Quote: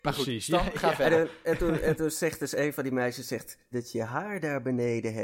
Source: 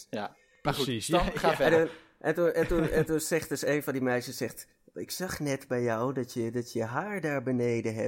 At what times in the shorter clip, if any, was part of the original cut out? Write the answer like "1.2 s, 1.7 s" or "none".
1.4 s, 3.7 s